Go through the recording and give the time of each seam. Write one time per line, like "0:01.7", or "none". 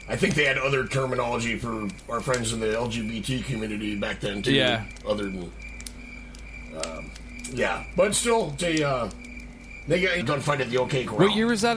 0:08.6
0:10.2

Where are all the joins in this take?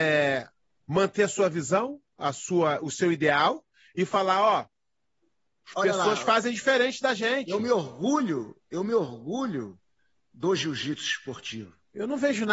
0:05.5

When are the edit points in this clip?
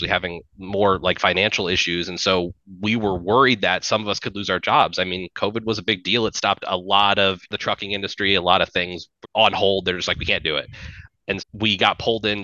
0:09.2
0:11.4

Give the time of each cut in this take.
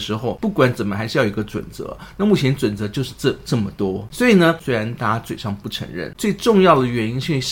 0:04.6
0:06.1

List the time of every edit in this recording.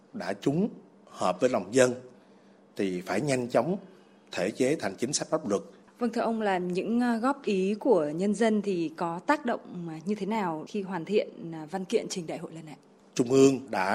0:05.8

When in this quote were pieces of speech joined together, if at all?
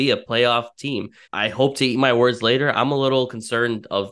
0:01.2

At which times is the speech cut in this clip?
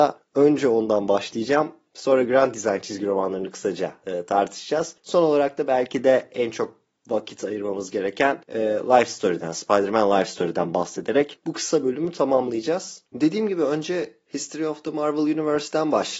none

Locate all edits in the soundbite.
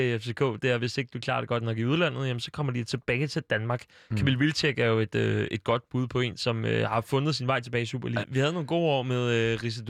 0:08.2

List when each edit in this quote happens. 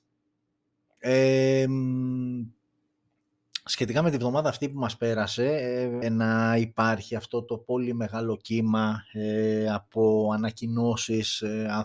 0:01.0
0:06.0

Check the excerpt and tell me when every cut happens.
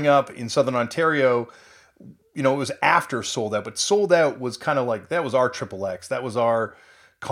none

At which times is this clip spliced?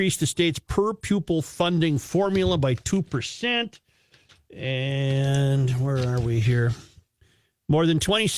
none

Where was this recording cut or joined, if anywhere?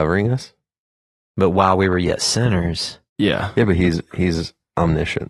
0:03.1

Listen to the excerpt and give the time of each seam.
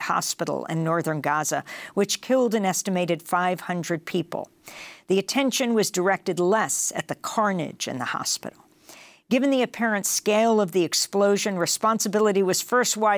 none

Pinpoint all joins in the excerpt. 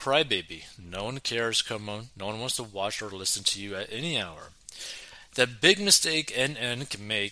none

